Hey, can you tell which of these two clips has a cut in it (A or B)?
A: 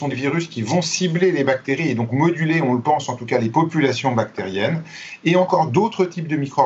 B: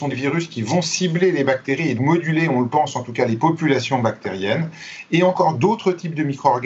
B